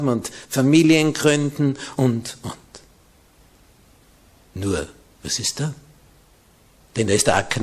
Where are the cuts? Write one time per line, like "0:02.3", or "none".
0:02.0
0:05.1